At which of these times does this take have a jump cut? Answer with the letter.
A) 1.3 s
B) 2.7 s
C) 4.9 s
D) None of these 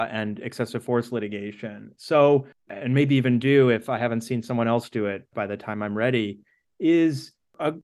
B